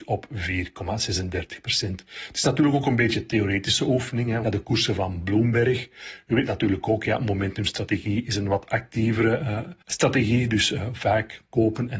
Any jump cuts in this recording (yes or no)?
yes